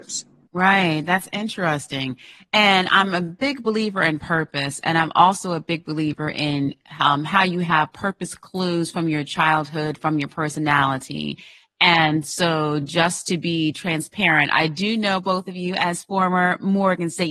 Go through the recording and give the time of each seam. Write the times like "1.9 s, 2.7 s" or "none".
none

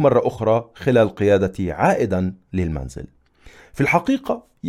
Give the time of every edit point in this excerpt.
none

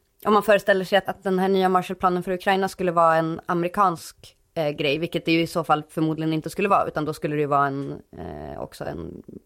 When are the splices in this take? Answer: 1.0 s

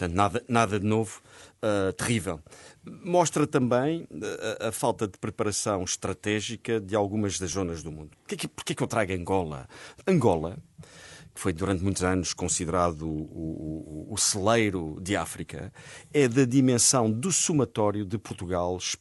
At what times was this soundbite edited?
8.1 s, 10.0 s

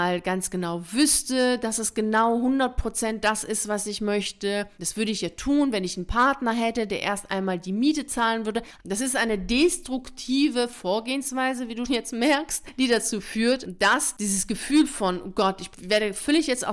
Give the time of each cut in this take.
8.8 s, 11.9 s

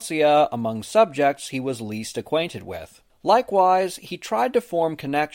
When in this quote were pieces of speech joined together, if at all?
3.1 s

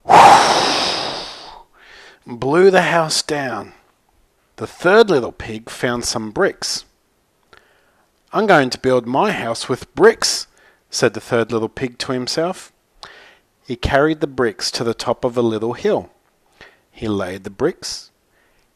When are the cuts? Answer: 4.4 s

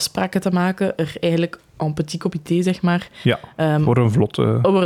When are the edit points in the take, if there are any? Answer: none

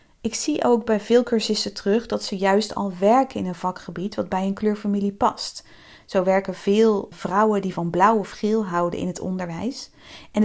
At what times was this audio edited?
7.1 s

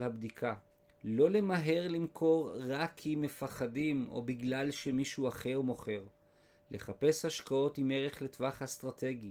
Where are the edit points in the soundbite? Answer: 0.9 s

